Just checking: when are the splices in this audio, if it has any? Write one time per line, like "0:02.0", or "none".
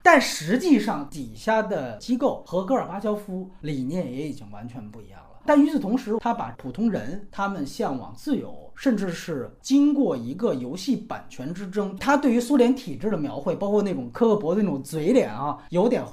0:05.4
0:09.6
0:12.0